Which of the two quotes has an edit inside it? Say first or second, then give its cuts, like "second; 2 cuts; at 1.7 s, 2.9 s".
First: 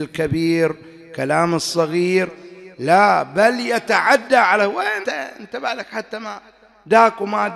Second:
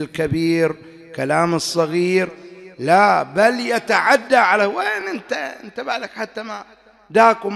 first; 1 cut; at 5.0 s